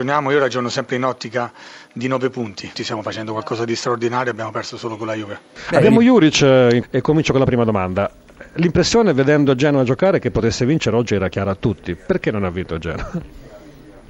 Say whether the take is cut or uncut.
cut